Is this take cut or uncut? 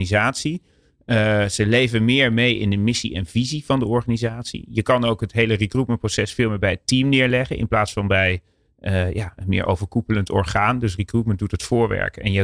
uncut